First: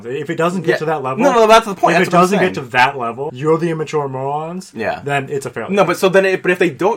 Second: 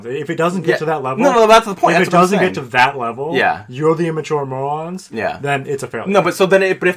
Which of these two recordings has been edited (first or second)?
first